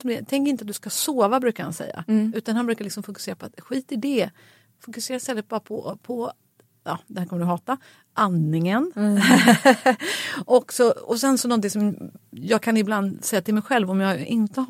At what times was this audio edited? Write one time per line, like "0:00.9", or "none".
none